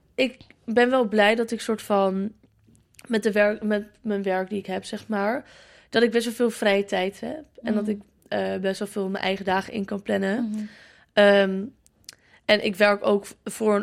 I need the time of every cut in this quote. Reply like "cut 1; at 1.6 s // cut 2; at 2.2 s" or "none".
none